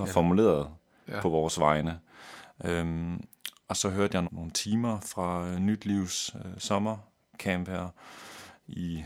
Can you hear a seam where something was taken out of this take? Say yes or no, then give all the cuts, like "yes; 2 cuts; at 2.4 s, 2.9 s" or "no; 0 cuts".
yes; 1 cut; at 4.2 s